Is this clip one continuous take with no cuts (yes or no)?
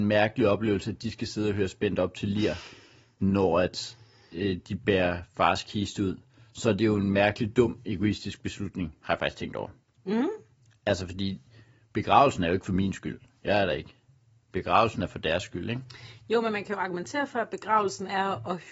yes